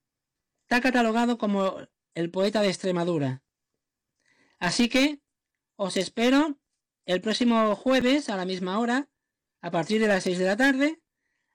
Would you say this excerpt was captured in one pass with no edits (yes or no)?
yes